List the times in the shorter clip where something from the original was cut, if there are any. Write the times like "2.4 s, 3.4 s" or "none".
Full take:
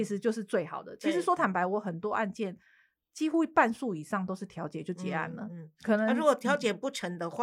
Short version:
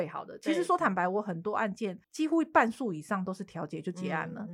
2.0 s